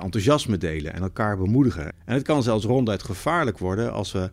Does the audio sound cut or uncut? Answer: cut